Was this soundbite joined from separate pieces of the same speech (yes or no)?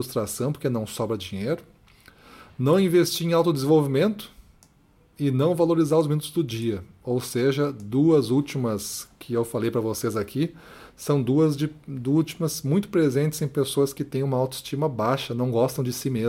no